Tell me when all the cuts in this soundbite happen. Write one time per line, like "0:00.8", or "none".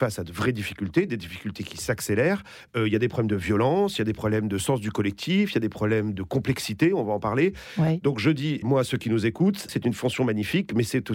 0:02.7
0:08.6
0:09.7